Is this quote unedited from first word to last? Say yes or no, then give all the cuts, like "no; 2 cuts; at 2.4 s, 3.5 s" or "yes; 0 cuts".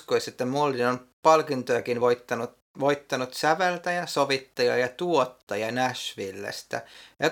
yes; 0 cuts